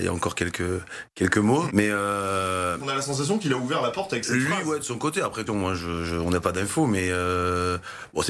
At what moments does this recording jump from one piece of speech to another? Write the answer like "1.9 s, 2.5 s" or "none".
1.7 s, 2.8 s, 5.5 s